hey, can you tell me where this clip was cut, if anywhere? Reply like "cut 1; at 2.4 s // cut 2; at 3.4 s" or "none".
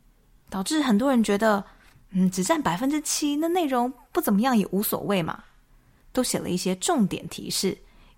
cut 1; at 6.0 s